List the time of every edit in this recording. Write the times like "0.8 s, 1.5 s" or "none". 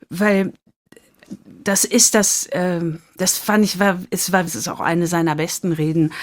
4.5 s